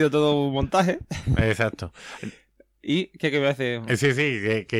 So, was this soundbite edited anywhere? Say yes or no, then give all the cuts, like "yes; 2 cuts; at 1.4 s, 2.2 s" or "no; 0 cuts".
no; 0 cuts